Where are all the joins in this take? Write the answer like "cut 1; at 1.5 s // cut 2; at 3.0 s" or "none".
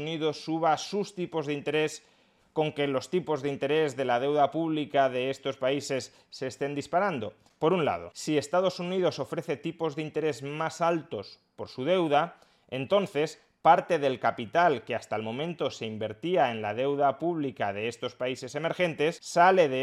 cut 1; at 7.5 s